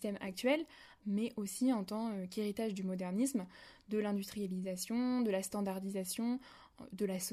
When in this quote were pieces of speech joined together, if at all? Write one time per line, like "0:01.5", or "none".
0:01.0